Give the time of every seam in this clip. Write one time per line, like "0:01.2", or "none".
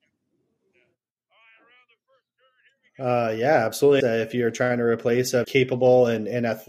0:04.0
0:05.4